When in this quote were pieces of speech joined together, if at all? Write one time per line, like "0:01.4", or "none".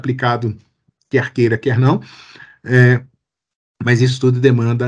none